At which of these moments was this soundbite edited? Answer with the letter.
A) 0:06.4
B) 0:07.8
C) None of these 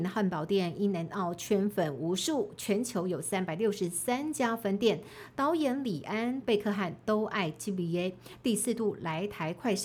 A